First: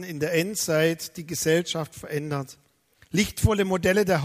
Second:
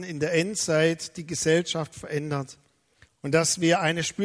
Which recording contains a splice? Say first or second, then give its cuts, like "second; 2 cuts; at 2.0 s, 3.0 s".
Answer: second; 1 cut; at 3.0 s